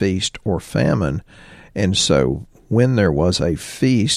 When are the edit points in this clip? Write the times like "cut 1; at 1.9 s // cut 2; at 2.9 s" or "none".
none